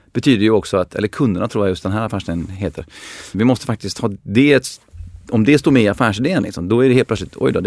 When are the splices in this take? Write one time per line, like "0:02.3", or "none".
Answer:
0:03.3